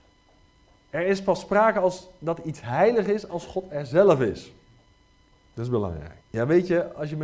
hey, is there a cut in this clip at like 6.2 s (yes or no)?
yes